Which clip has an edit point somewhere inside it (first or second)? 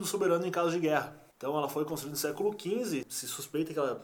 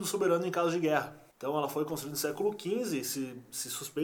first